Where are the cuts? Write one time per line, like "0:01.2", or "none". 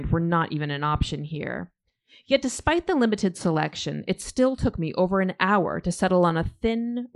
none